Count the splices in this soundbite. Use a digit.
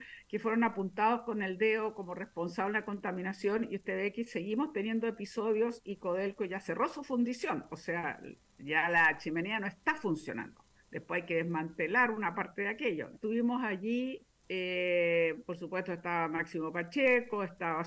1